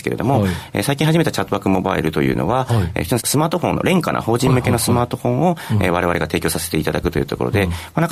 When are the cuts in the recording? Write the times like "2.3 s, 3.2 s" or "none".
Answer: 3.2 s